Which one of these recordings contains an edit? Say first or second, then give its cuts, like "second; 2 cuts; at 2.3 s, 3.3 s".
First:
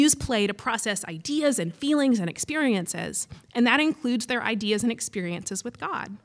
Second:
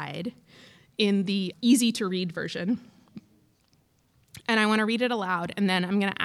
second; 1 cut; at 1.5 s